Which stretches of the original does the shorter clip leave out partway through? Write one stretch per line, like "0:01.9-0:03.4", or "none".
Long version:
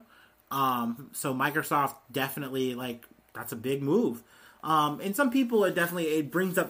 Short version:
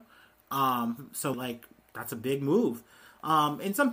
0:01.3-0:02.7